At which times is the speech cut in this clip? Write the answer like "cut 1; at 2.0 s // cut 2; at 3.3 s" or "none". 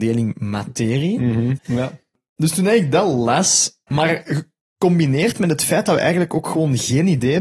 cut 1; at 1.6 s // cut 2; at 3.9 s